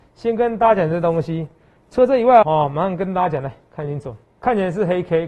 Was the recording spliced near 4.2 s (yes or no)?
yes